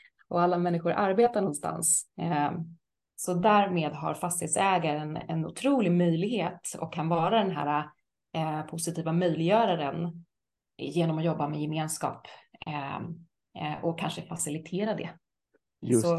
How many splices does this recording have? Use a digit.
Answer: 1